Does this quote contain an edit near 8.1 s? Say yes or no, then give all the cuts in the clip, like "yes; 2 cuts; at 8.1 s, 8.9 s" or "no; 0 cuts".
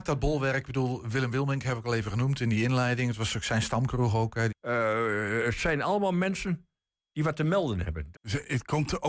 yes; 2 cuts; at 4.5 s, 8.1 s